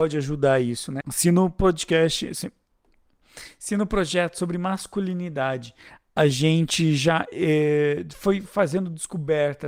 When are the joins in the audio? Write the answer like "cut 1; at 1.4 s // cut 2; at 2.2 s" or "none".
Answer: cut 1; at 1.0 s